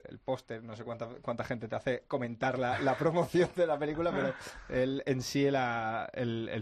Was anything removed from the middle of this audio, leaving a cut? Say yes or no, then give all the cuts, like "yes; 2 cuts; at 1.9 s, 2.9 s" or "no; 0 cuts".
no; 0 cuts